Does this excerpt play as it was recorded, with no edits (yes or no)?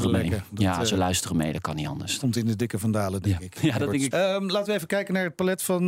no